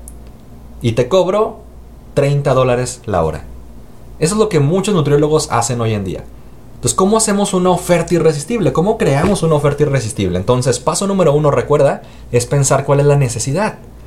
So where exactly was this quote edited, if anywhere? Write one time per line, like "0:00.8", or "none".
none